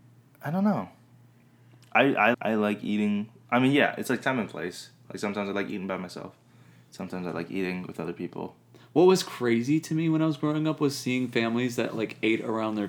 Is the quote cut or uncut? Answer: cut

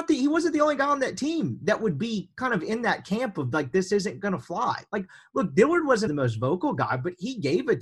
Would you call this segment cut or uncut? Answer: cut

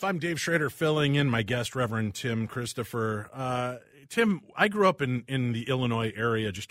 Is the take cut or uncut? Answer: uncut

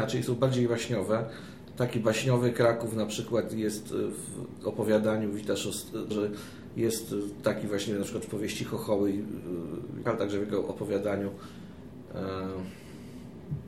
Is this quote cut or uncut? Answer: cut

